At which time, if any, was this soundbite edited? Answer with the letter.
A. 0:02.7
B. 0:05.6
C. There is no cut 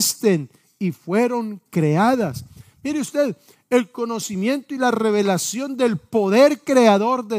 C